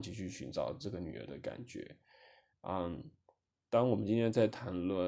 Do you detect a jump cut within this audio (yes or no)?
yes